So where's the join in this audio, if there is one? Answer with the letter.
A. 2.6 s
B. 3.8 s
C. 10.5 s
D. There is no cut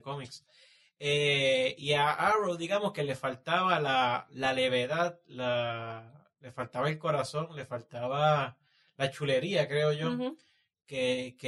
D